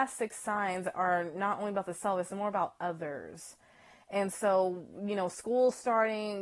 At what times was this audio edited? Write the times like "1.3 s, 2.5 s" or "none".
none